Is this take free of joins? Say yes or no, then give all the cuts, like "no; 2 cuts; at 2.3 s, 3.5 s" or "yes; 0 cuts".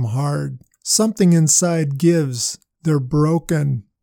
no; 1 cut; at 2.7 s